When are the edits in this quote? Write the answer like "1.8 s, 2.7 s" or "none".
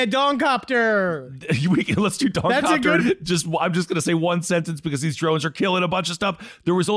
3.0 s